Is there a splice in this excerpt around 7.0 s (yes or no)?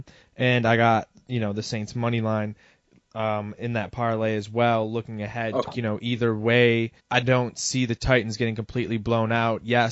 yes